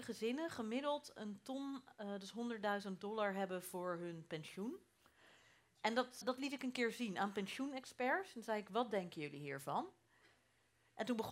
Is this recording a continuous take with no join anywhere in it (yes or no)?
no